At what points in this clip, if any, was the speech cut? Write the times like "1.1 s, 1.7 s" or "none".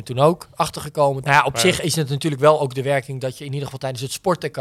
1.2 s